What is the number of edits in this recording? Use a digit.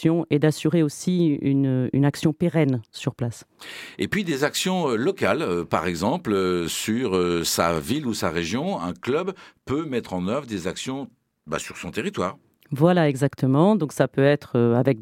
0